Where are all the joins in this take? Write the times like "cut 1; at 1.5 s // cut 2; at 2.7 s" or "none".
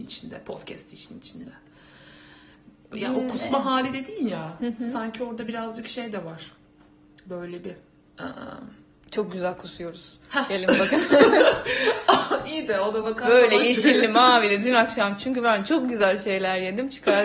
none